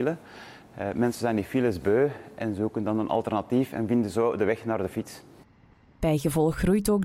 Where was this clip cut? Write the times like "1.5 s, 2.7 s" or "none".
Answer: none